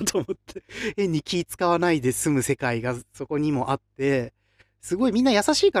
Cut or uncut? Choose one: uncut